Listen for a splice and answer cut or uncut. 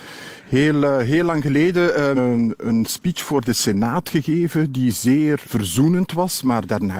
cut